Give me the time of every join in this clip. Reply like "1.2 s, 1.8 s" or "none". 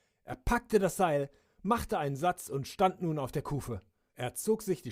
1.5 s